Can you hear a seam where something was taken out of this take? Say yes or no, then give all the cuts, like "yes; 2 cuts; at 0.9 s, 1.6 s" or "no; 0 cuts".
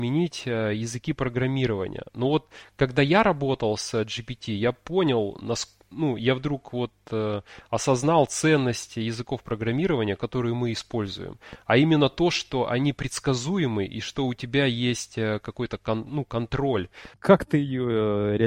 yes; 1 cut; at 17.1 s